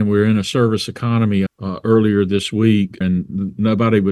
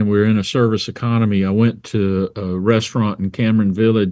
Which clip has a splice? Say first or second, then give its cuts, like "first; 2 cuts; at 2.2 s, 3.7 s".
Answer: first; 2 cuts; at 1.5 s, 3.0 s